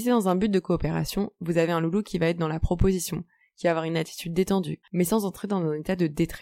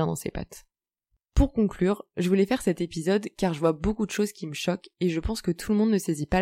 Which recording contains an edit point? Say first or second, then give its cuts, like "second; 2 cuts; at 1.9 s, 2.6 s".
first; 1 cut; at 4.8 s